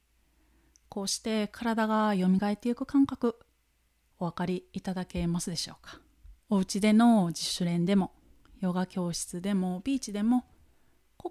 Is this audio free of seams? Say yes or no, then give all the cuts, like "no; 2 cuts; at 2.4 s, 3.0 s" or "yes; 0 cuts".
no; 1 cut; at 6.4 s